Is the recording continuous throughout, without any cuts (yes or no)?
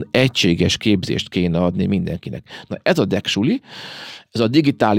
no